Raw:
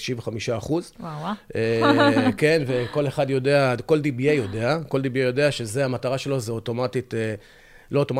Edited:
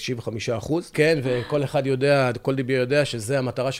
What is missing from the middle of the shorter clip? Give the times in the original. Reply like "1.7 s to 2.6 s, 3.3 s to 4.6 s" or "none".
0.9 s to 2.4 s, 3.9 s to 4.9 s